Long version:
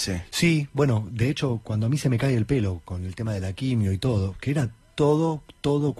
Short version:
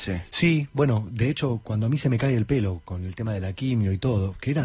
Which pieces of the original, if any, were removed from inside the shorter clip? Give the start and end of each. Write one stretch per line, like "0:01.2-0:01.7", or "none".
none